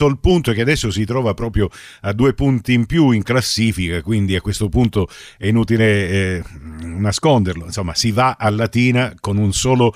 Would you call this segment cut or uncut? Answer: uncut